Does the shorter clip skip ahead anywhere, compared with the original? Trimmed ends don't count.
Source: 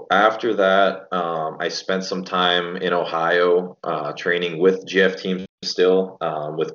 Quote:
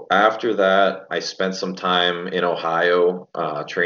yes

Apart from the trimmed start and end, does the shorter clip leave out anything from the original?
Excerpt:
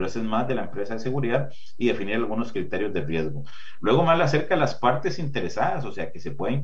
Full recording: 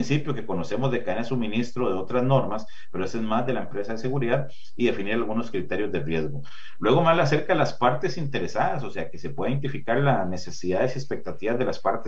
no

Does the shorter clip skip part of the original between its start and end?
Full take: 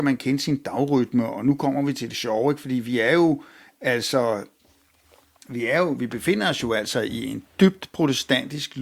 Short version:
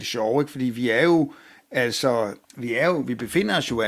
yes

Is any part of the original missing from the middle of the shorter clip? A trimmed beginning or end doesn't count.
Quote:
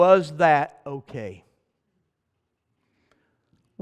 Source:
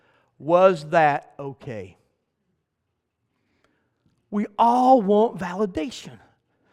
no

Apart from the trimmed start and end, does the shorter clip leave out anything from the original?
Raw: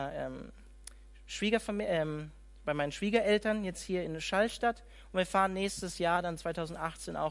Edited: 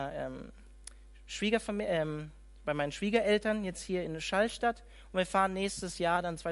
no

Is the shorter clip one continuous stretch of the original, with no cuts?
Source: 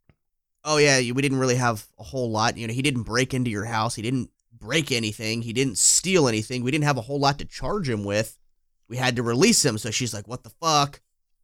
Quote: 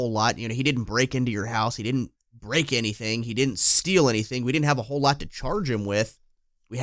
yes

